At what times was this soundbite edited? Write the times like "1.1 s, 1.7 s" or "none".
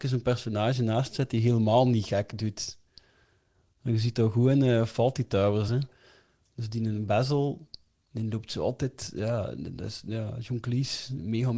none